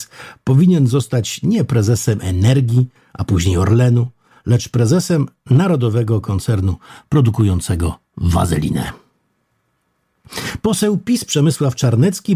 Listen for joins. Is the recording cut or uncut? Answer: uncut